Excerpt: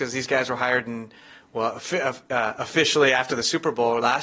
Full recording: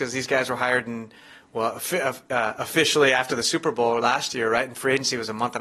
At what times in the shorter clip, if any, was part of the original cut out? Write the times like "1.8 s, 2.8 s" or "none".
none